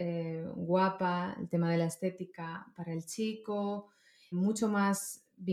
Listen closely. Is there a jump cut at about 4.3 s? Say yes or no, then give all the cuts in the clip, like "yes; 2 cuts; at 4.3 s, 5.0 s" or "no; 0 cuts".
yes; 1 cut; at 4.3 s